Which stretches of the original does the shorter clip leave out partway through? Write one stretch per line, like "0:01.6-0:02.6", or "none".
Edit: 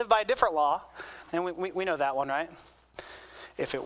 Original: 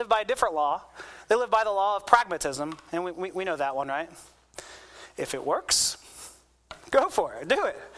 0:01.2-0:02.8